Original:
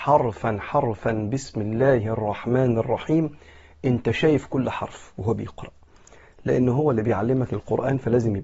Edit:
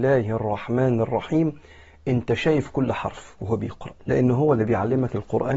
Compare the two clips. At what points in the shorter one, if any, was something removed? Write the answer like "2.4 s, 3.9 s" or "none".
4.0 s